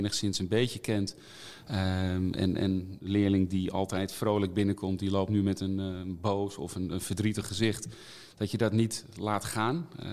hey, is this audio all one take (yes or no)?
yes